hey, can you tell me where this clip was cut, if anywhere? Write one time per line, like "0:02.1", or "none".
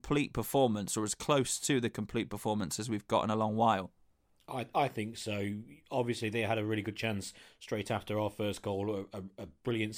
none

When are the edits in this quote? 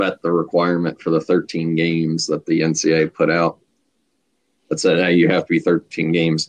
none

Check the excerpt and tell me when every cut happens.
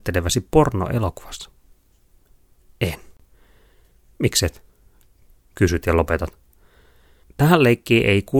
none

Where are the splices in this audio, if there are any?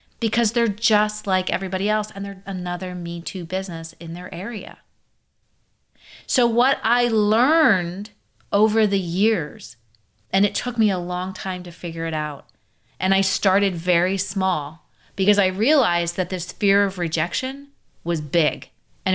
0:02.4

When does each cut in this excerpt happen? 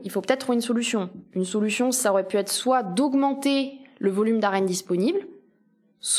none

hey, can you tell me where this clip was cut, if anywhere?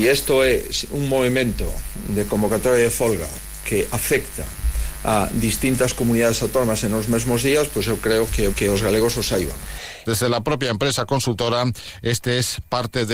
0:08.5
0:10.1

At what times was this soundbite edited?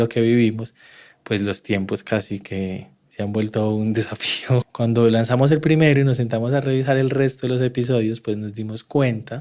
0:04.6

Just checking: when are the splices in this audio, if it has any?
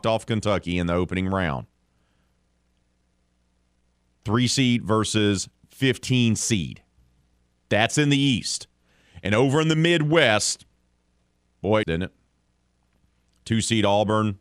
0:11.8

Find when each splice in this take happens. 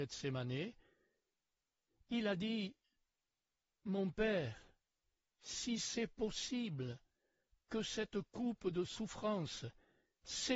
none

